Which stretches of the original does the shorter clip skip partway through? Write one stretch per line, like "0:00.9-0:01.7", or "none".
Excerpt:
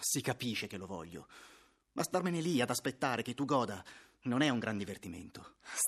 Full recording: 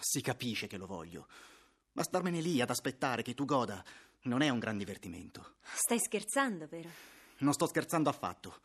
none